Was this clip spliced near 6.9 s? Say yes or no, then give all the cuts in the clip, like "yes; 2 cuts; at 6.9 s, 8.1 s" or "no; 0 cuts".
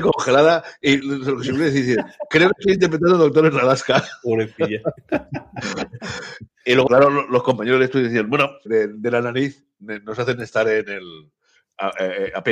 yes; 2 cuts; at 6.9 s, 8.7 s